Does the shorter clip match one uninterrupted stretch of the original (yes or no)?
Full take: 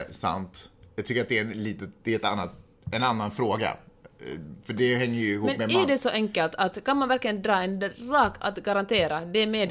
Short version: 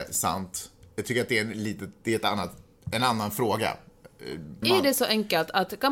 no